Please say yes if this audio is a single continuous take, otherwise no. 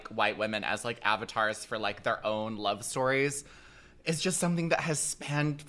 yes